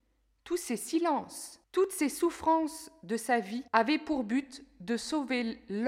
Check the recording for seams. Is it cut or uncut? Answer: cut